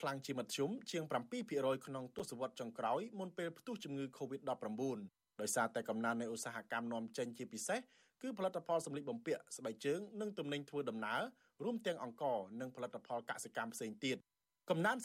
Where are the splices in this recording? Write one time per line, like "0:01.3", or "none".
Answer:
none